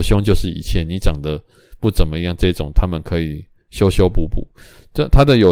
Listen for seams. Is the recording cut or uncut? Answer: uncut